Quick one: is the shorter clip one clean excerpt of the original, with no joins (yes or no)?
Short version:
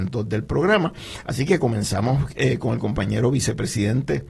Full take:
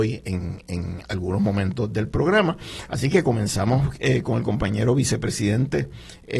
yes